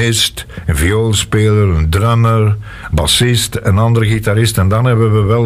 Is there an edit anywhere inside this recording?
no; 0 cuts

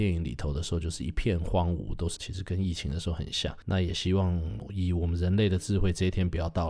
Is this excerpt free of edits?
no; 1 cut; at 2.2 s

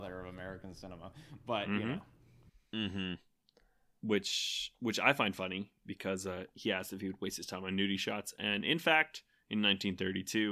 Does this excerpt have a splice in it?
no; 0 cuts

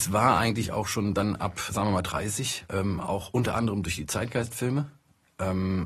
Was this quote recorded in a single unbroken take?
no; 1 cut; at 1.7 s

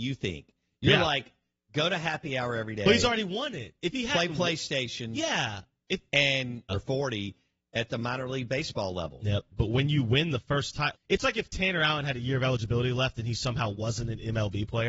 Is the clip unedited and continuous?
no; 3 cuts; at 6.7 s, 9.5 s, 10.9 s

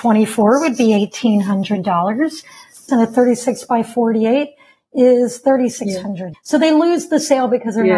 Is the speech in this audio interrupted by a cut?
yes; 2 cuts; at 2.9 s, 6.3 s

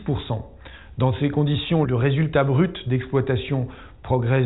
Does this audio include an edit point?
yes; 1 cut; at 1.8 s

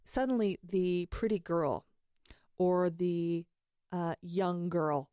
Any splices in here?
no; 0 cuts

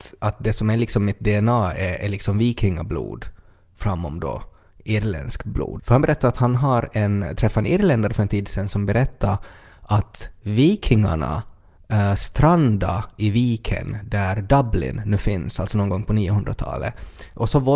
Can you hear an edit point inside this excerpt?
yes; 1 cut; at 5.8 s

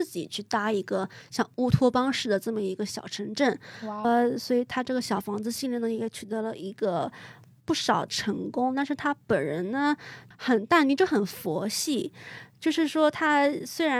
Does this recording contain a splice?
no; 0 cuts

